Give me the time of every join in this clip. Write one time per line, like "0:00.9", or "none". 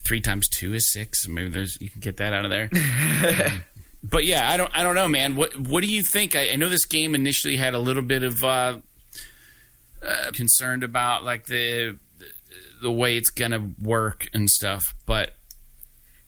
0:10.3